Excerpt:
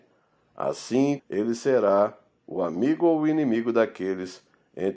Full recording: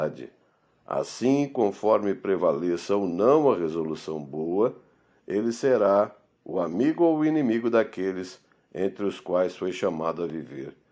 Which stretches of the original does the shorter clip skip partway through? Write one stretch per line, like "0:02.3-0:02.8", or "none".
0:01.5-0:05.2